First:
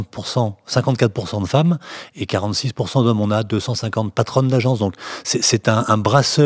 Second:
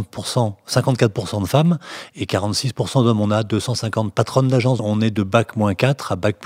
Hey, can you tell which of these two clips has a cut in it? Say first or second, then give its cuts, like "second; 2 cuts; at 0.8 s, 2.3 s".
second; 1 cut; at 4.8 s